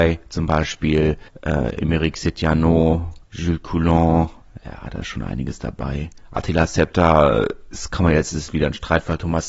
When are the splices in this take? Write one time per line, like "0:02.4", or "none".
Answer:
none